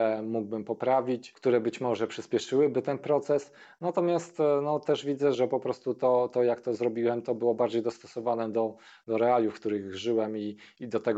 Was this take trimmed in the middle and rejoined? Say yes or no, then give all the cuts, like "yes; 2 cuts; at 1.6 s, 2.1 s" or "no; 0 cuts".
yes; 1 cut; at 5.3 s